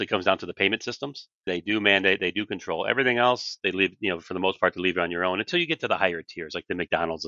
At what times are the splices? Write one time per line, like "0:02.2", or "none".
0:01.5